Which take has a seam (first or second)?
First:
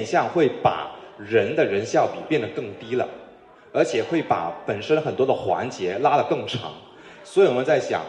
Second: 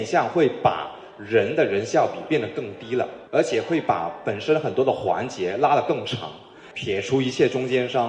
second